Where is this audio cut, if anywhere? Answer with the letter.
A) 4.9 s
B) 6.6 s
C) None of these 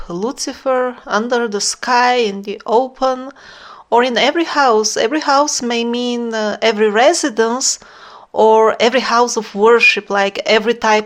C